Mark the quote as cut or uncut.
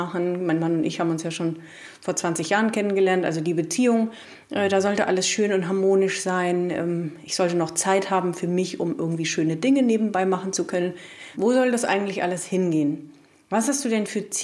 cut